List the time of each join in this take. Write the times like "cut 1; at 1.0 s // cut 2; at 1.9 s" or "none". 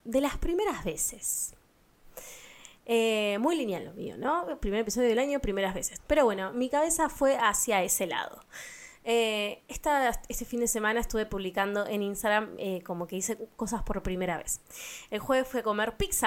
cut 1; at 6.0 s